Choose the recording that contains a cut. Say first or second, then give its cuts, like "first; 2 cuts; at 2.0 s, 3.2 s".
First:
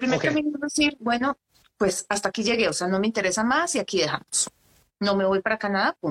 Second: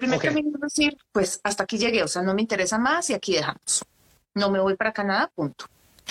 second; 1 cut; at 1.0 s